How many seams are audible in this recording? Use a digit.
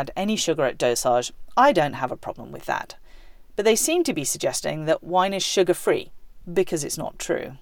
1